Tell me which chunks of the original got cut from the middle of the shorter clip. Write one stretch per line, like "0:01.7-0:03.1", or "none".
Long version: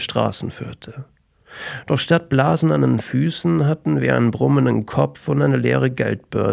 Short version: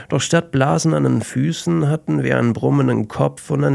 none